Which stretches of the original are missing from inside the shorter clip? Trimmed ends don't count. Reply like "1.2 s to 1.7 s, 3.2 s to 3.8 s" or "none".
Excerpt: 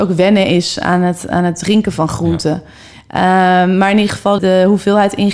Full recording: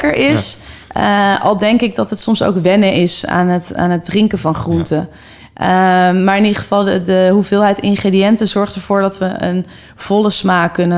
6.8 s to 7.0 s